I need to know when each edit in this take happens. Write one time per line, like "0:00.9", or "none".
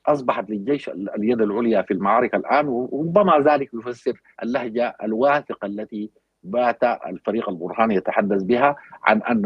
0:04.3